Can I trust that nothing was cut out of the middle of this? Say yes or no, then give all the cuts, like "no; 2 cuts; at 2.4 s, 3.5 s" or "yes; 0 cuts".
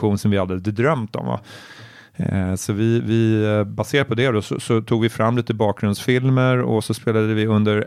yes; 0 cuts